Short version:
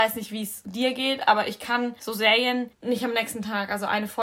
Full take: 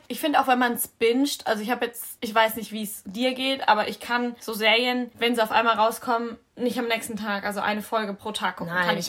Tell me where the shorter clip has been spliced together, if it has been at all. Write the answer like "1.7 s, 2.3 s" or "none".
2.7 s